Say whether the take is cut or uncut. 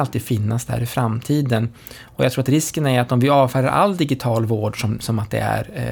uncut